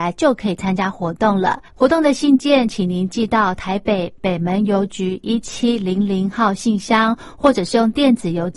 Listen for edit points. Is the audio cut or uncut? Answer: cut